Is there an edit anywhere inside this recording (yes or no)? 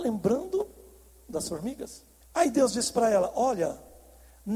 yes